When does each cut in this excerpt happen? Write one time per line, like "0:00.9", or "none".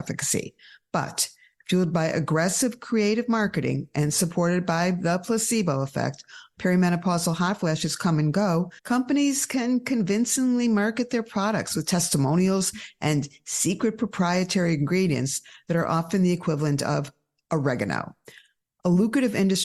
0:06.5
0:08.8